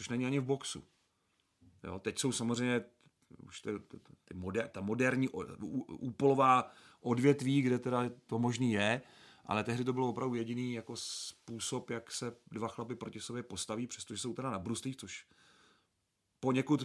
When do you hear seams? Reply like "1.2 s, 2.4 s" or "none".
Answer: none